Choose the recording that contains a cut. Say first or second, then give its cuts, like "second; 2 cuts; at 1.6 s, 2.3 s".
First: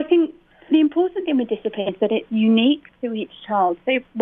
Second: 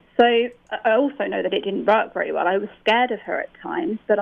first; 1 cut; at 1.9 s